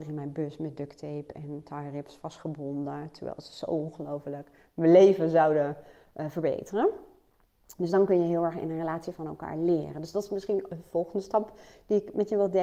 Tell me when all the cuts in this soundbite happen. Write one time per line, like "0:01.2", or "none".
none